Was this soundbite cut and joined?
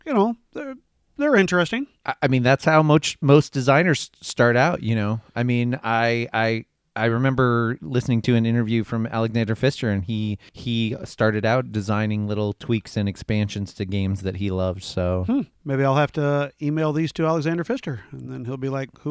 no; 0 cuts

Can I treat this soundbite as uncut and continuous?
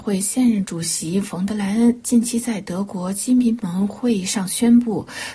yes; 0 cuts

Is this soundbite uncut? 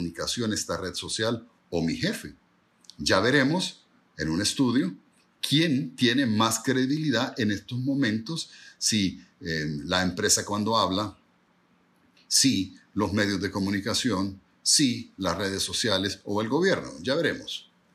yes; 0 cuts

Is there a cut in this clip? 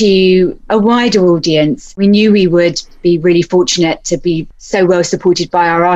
no; 0 cuts

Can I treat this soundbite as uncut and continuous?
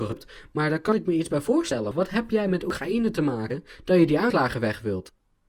no; 1 cut; at 1.9 s

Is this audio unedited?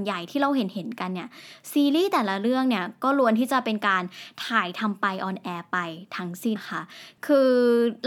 no; 1 cut; at 6.6 s

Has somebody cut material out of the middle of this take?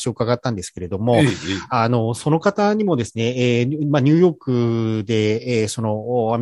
no; 0 cuts

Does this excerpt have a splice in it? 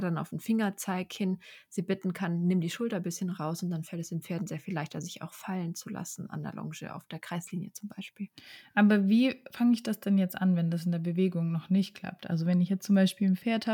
no; 0 cuts

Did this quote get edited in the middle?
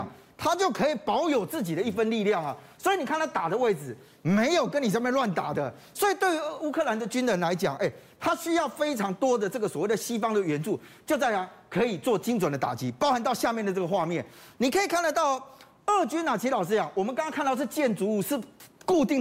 yes; 1 cut; at 2.8 s

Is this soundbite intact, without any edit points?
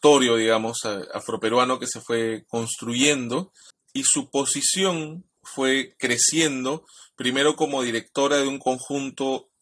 no; 2 cuts; at 3.7 s, 5.4 s

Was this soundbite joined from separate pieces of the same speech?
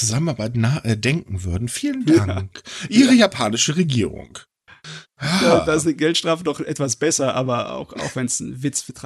no; 0 cuts

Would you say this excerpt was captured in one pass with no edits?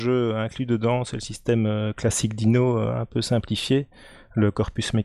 yes; 0 cuts

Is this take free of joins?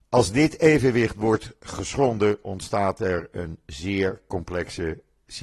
yes; 0 cuts

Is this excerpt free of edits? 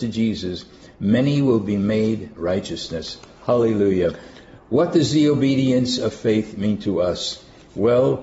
yes; 0 cuts

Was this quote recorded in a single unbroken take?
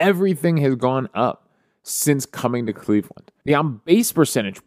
no; 1 cut; at 3.4 s

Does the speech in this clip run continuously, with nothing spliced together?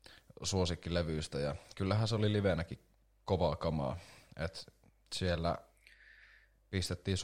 yes; 0 cuts

